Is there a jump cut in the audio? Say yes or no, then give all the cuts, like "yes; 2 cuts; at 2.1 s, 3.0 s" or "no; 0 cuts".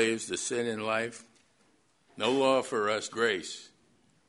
yes; 1 cut; at 3.1 s